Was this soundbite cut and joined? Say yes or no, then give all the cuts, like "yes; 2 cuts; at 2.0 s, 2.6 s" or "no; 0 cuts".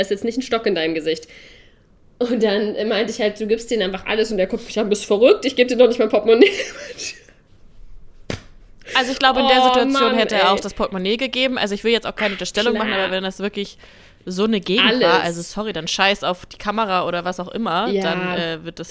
no; 0 cuts